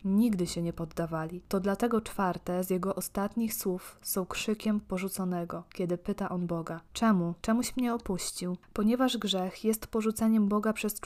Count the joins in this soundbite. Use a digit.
1